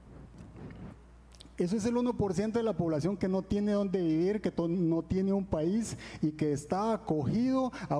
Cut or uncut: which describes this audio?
cut